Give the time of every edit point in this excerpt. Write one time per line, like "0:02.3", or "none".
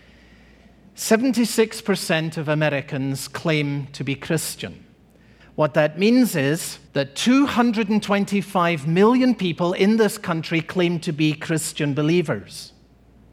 0:05.4
0:06.9